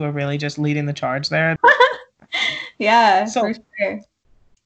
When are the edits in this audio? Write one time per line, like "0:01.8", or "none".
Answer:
0:01.6